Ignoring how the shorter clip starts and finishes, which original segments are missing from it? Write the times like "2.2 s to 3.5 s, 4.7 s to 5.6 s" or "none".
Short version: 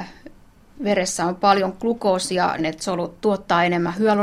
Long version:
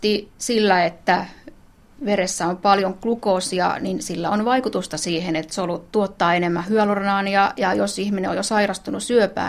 3.8 s to 5.3 s

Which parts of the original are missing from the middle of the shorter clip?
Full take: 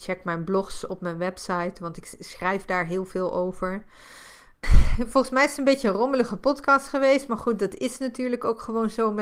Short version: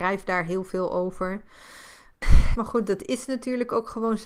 5.0 s to 7.3 s

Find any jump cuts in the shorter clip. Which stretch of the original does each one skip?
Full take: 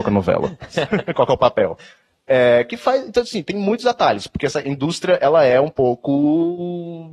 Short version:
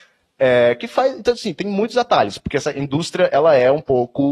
none

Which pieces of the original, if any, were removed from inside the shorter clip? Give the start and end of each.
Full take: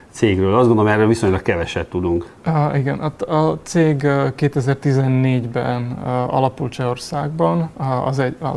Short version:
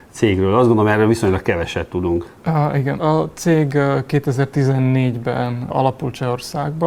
3.0 s to 3.3 s, 6.0 s to 6.3 s

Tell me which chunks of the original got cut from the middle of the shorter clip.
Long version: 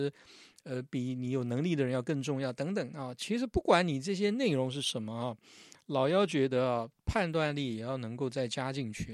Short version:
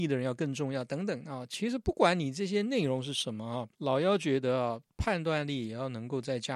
5.4 s to 5.8 s

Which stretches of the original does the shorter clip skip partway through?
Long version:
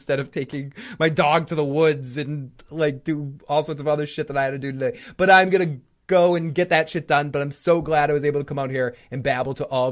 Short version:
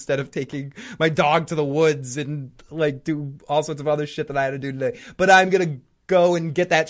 none

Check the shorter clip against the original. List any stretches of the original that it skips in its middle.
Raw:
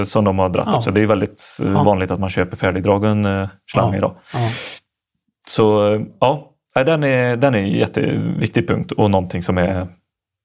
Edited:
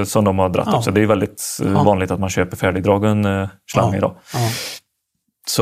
none

